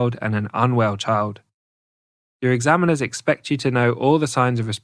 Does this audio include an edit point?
no; 0 cuts

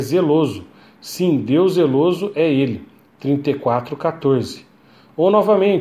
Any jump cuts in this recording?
no; 0 cuts

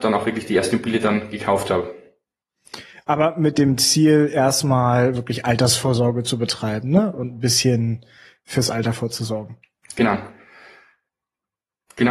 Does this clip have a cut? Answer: no; 0 cuts

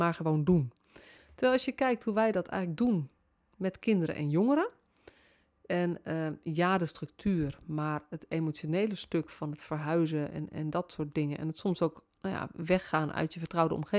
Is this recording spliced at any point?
yes; 1 cut; at 1.2 s

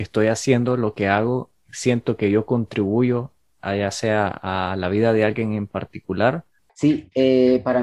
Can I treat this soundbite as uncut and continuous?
yes; 0 cuts

